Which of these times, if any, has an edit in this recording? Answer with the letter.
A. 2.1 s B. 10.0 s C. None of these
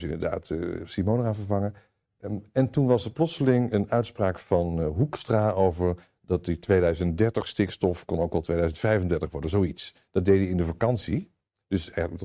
C